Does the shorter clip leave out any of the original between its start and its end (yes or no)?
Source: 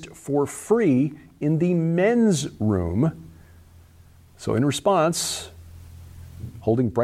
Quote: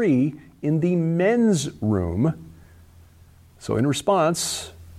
no